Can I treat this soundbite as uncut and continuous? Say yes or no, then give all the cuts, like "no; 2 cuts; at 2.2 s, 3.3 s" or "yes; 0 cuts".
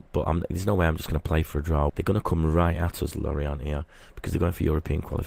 no; 1 cut; at 1.9 s